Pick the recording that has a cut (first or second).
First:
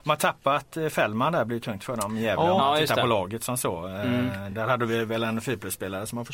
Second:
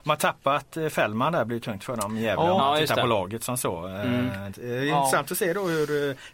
second